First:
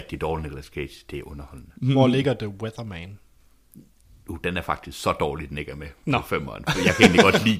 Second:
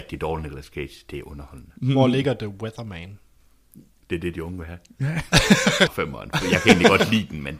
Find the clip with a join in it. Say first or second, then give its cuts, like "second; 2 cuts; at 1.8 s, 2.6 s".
second; 2 cuts; at 4.0 s, 5.9 s